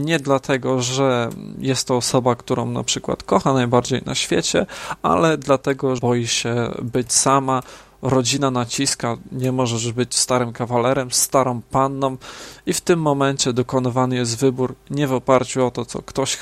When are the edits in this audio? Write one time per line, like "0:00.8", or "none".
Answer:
0:06.0